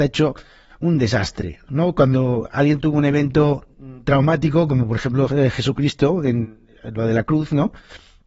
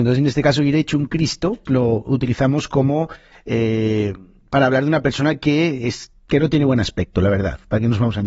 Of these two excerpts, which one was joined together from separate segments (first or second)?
second